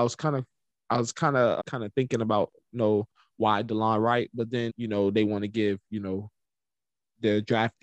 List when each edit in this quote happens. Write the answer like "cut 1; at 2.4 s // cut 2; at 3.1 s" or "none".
cut 1; at 1.6 s // cut 2; at 4.7 s